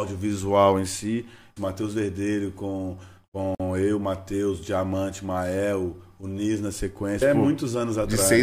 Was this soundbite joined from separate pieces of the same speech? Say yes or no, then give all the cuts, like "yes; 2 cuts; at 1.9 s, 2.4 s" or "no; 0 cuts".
yes; 2 cuts; at 1.6 s, 7.2 s